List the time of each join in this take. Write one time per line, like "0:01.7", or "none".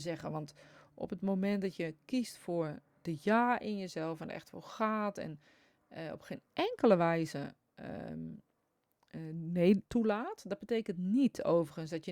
none

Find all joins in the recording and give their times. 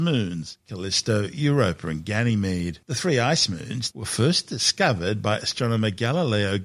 0:02.8
0:03.9

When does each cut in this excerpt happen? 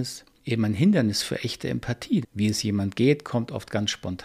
0:02.2

